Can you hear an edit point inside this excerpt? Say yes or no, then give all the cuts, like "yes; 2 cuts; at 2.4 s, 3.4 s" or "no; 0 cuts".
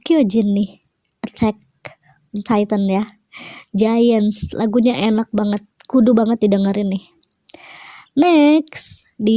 no; 0 cuts